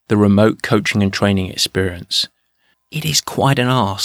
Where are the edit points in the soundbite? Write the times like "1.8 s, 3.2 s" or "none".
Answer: 2.7 s